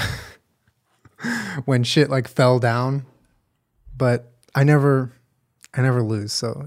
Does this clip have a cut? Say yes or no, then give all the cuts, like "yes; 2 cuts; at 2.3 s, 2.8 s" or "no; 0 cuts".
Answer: no; 0 cuts